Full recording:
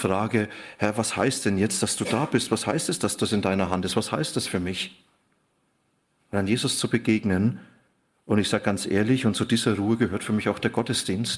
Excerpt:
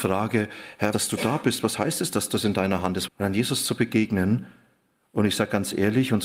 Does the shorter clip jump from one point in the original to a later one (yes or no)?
yes